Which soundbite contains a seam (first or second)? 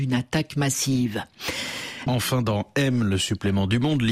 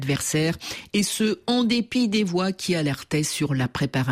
first